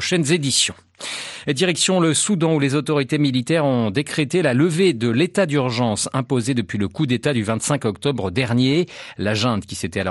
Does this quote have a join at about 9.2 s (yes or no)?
no